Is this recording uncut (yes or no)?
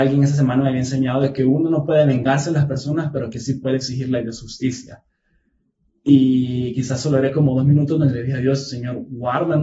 yes